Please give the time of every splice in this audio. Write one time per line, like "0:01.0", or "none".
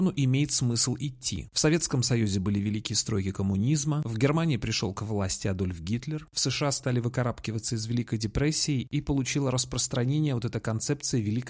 none